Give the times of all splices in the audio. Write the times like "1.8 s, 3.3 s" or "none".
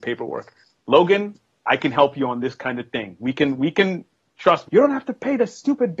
4.7 s

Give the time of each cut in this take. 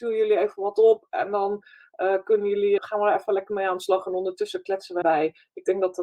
2.8 s, 5.0 s

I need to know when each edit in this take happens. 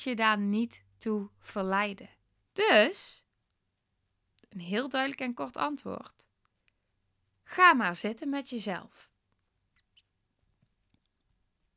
2.4 s

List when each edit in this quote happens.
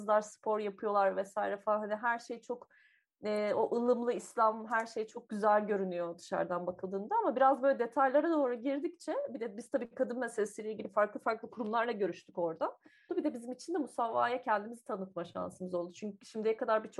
13.1 s

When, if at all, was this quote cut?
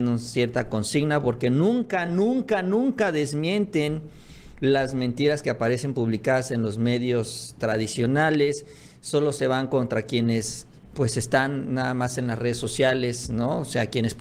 none

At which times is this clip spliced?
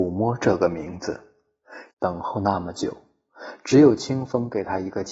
1.9 s

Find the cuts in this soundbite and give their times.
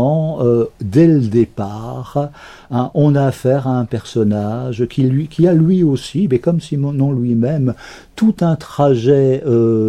none

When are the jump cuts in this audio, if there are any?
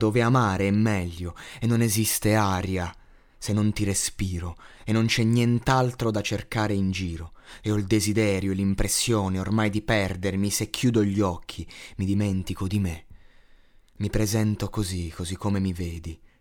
none

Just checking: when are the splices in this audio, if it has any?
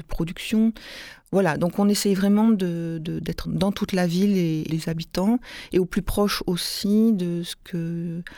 3.4 s, 4.7 s

